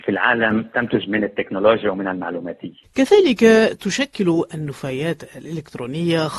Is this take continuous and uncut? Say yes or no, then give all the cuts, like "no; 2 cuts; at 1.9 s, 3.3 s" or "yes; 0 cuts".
no; 1 cut; at 2.8 s